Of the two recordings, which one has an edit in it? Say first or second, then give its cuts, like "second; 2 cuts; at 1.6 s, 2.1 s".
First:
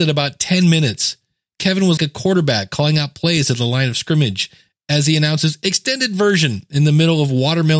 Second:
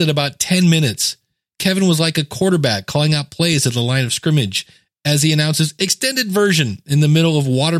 first; 1 cut; at 2.0 s